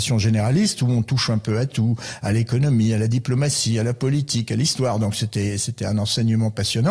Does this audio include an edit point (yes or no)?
no